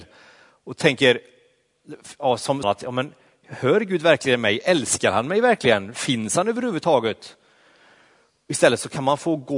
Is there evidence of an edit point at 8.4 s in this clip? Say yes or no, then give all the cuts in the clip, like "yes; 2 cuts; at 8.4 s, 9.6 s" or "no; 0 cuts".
no; 1 cut; at 2.6 s